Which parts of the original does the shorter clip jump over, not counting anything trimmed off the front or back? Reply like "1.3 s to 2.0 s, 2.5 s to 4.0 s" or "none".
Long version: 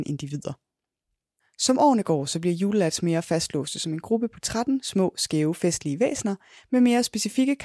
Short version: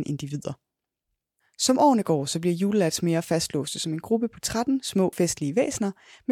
5.1 s to 5.6 s